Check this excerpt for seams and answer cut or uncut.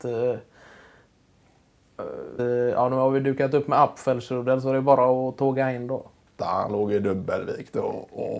cut